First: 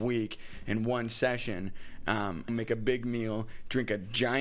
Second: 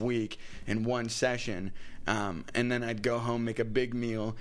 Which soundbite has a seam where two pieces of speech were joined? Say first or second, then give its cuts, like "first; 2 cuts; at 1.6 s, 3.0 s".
first; 1 cut; at 2.5 s